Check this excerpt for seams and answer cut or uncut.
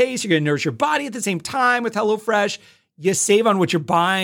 uncut